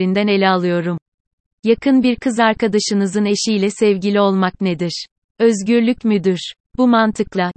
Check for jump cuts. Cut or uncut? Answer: uncut